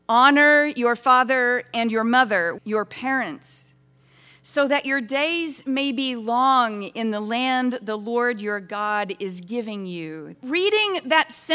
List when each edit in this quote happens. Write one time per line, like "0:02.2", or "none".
0:02.6
0:10.3